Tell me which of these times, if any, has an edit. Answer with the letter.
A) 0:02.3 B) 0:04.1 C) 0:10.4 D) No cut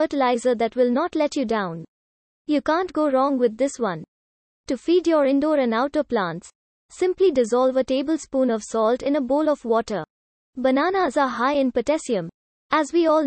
C